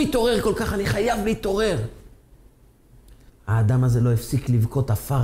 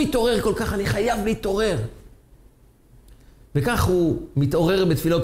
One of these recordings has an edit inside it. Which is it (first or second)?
first